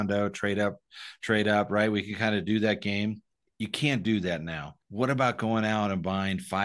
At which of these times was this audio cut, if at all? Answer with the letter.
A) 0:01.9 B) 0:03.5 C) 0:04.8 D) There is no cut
C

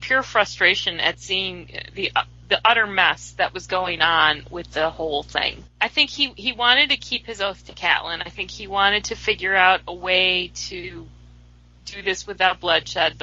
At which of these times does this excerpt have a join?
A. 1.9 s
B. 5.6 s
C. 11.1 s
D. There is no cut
B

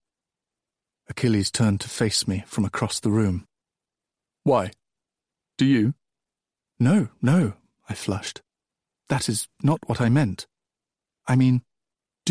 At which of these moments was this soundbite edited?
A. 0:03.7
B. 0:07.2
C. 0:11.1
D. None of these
C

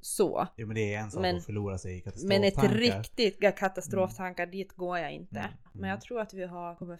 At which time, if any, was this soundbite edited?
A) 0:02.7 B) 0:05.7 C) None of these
B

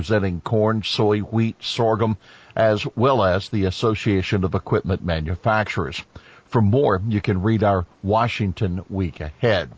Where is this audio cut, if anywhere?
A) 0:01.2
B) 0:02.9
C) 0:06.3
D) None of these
D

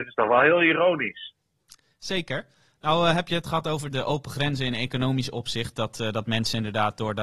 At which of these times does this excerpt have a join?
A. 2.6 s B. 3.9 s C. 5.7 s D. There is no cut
B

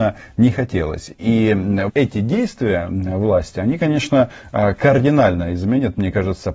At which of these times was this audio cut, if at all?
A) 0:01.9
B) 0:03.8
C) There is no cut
A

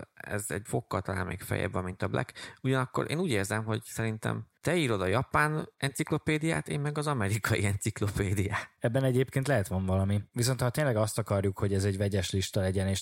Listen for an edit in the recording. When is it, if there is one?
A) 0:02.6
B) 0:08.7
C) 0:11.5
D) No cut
D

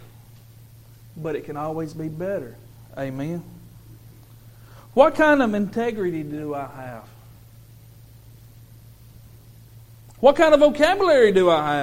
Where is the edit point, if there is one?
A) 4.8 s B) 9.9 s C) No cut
C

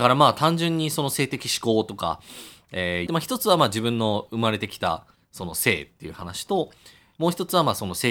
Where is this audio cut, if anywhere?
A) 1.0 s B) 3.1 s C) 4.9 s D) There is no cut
B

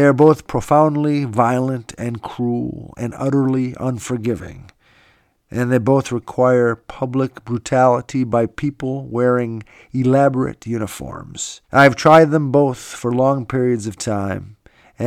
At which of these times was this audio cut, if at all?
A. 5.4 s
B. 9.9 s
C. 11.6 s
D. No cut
C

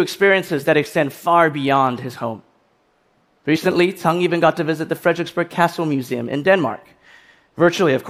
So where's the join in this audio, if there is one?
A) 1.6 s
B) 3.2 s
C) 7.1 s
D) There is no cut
D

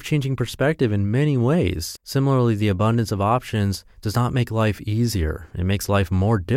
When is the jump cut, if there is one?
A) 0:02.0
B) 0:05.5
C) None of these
A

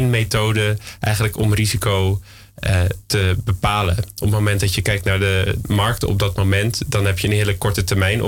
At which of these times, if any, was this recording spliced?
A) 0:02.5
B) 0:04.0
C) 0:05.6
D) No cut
C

